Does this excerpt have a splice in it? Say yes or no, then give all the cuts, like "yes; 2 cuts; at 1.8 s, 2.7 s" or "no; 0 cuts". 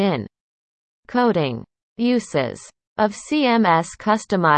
yes; 1 cut; at 1.8 s